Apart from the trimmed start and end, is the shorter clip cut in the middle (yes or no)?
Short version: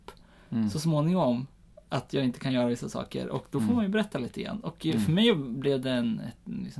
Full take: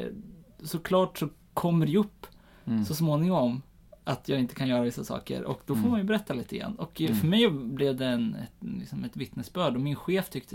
no